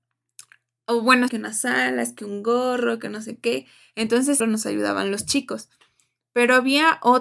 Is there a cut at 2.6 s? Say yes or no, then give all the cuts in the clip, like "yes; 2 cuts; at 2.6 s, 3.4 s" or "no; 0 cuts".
no; 2 cuts; at 1.3 s, 4.4 s